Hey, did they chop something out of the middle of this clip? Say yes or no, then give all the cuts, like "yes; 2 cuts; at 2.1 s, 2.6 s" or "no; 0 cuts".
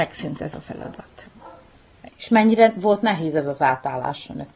yes; 1 cut; at 2.1 s